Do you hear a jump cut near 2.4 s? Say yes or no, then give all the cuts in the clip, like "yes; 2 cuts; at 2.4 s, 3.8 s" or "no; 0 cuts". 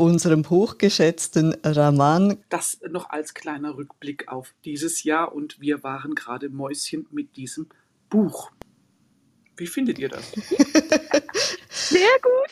yes; 1 cut; at 2.4 s